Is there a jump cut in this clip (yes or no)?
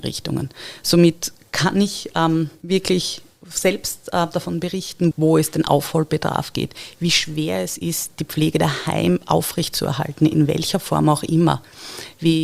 yes